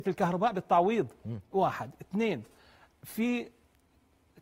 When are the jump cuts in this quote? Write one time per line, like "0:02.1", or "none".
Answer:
0:01.5